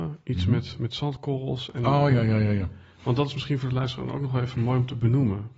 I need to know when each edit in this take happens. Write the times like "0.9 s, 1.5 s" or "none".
none

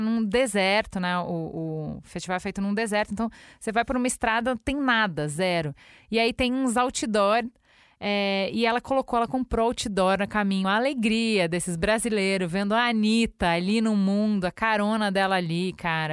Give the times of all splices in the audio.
none

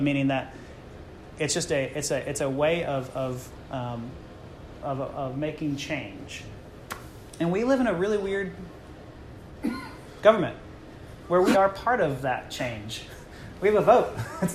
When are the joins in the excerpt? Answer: 4.8 s, 11.5 s

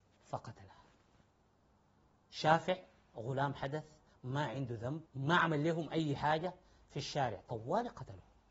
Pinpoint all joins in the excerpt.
5.1 s

